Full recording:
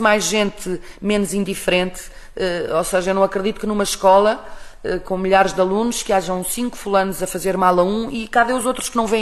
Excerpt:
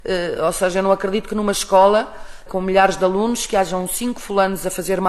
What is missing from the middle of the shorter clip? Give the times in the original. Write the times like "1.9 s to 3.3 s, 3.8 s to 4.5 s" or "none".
4.8 s to 5.0 s